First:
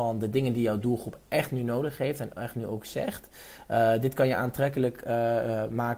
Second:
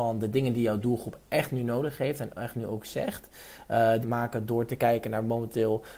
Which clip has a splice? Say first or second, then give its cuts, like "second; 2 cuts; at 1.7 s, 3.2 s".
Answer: second; 1 cut; at 4.0 s